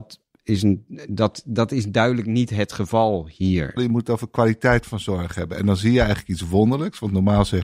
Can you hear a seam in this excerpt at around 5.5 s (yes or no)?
no